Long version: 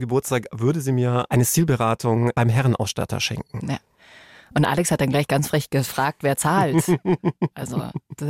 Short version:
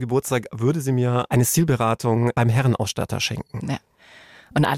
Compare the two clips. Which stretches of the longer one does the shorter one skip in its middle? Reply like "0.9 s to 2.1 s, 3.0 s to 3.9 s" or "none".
none